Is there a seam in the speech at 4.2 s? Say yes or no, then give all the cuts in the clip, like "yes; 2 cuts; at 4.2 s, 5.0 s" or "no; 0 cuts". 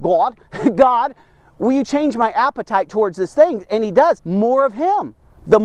yes; 1 cut; at 4.2 s